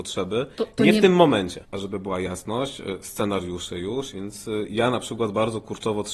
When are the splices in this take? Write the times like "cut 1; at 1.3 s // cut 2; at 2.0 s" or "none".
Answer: cut 1; at 1.6 s // cut 2; at 4.1 s